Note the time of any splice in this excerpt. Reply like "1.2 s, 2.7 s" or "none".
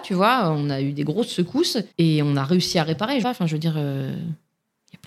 3.2 s